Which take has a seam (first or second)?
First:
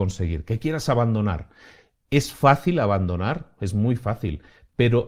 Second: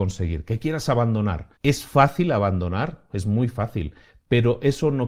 second